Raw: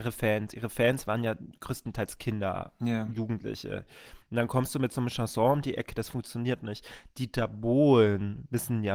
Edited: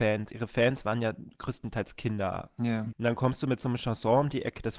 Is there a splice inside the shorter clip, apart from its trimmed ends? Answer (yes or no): yes